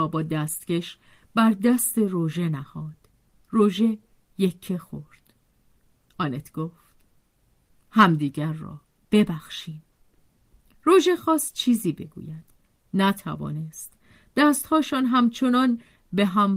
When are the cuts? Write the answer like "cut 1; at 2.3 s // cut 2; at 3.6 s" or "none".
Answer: cut 1; at 6.1 s